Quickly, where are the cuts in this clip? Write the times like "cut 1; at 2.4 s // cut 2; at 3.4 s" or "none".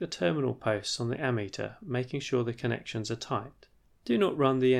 cut 1; at 3.8 s